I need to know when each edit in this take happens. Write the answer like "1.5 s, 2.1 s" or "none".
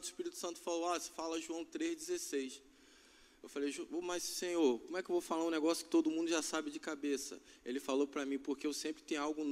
none